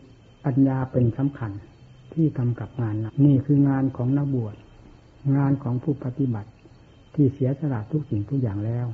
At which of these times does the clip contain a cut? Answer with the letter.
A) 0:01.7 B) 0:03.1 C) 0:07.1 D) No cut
B